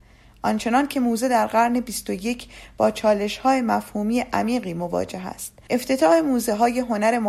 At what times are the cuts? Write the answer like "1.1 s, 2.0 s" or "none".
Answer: 5.7 s